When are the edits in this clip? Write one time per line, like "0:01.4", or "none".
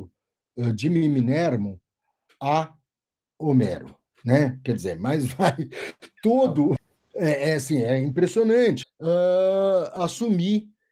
0:06.8
0:08.8